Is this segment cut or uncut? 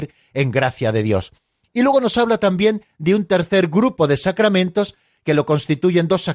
uncut